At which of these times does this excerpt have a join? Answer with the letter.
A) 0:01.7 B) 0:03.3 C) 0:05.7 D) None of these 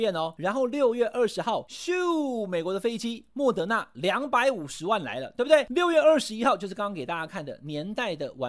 D